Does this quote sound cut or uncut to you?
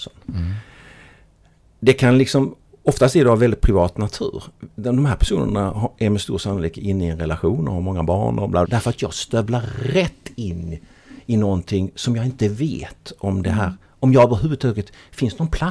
cut